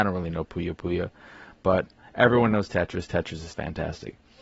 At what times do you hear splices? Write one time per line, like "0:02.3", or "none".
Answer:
0:03.5